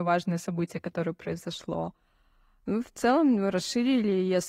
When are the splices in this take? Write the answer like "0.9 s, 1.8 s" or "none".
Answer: none

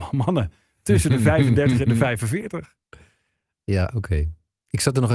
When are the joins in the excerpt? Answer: none

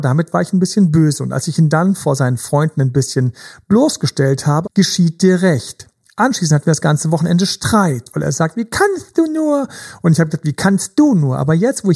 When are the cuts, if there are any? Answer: 4.6 s

